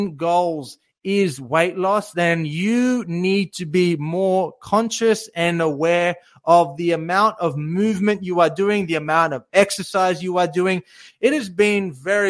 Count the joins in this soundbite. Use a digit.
0